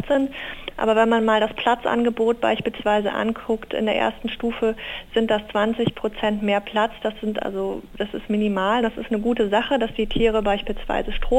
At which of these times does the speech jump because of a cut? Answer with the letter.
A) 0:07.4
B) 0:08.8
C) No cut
B